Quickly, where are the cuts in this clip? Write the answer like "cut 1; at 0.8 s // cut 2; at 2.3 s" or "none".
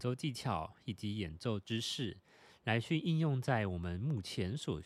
none